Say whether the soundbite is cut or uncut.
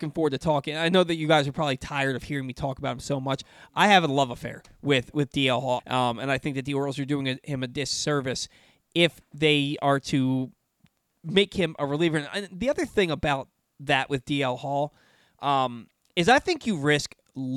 cut